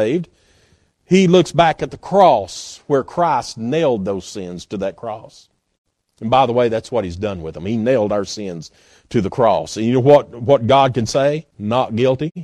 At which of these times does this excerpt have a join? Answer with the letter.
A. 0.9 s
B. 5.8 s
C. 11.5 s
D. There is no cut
C